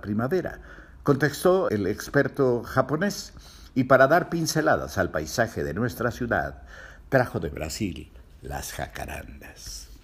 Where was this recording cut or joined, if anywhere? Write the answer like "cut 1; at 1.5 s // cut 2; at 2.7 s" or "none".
cut 1; at 1.7 s